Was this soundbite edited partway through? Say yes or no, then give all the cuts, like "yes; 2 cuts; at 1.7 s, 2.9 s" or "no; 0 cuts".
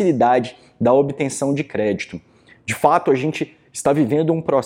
no; 0 cuts